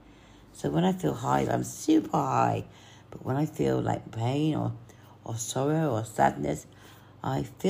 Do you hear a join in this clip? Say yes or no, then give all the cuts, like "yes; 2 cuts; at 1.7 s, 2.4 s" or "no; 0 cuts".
no; 0 cuts